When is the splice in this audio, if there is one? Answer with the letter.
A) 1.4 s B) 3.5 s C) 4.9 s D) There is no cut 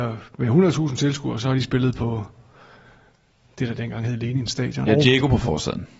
C